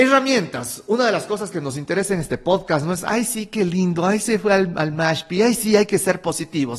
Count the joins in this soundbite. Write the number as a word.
zero